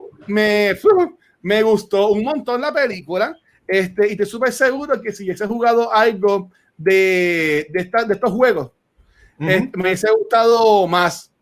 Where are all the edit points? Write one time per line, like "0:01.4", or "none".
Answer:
none